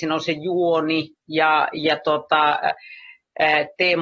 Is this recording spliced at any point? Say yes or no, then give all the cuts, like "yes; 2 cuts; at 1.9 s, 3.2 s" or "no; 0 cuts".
no; 0 cuts